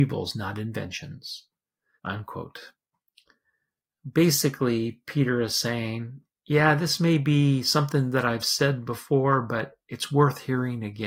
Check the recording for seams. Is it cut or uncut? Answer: cut